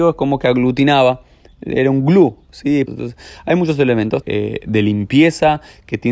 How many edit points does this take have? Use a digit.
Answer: 2